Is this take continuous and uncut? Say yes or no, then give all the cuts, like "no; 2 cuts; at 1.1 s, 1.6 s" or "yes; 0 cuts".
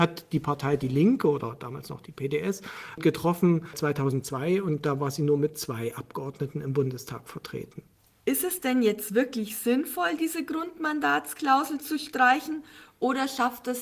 yes; 0 cuts